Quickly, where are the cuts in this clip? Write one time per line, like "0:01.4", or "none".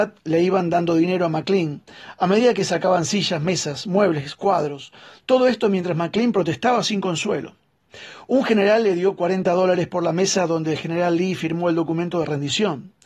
none